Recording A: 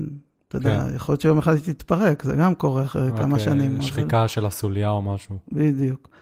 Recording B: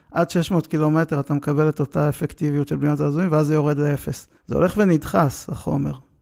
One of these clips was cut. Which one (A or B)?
B